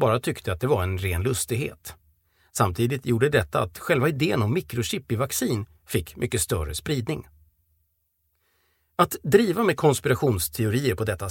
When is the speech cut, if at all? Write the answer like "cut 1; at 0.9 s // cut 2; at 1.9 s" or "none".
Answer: none